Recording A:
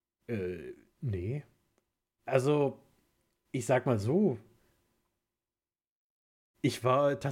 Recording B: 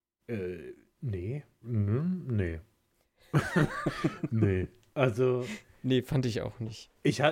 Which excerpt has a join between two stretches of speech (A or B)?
B